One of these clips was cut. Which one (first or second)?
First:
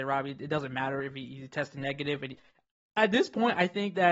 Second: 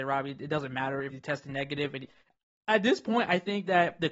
second